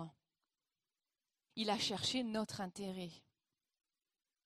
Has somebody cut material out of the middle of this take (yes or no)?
yes